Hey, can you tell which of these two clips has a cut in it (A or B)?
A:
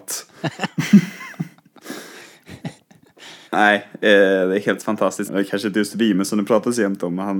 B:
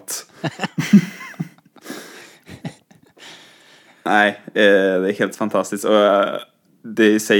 A